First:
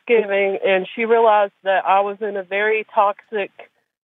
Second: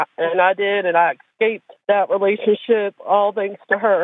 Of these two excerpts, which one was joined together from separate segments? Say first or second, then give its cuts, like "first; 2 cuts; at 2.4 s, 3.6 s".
second; 1 cut; at 1.8 s